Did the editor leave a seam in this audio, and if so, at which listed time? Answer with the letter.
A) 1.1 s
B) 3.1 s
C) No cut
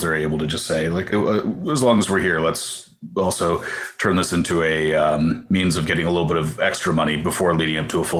A